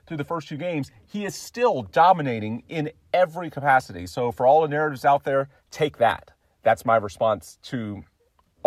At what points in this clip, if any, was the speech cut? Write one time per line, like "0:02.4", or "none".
0:05.6